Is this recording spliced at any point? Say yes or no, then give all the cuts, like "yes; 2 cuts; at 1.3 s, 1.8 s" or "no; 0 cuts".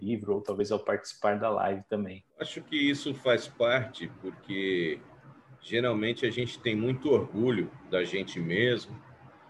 yes; 1 cut; at 2.3 s